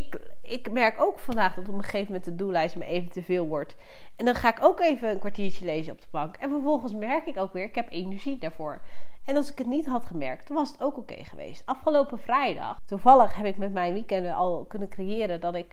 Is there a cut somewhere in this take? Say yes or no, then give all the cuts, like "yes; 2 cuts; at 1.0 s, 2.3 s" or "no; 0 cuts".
yes; 1 cut; at 12.8 s